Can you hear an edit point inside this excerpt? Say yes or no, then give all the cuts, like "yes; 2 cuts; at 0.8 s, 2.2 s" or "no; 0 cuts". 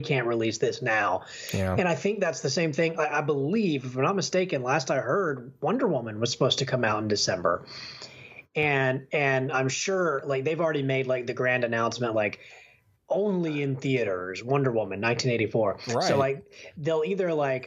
no; 0 cuts